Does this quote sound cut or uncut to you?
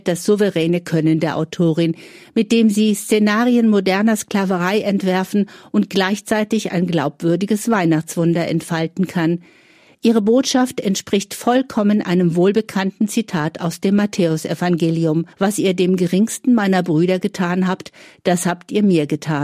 cut